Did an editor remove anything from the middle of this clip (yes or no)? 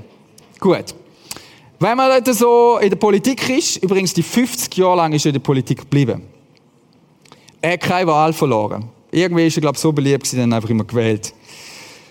no